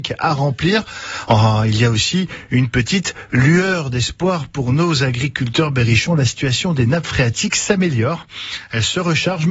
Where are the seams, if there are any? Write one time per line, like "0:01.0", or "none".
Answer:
0:01.3